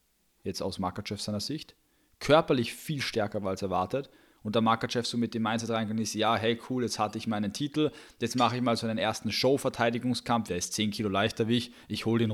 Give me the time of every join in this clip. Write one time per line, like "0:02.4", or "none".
0:10.5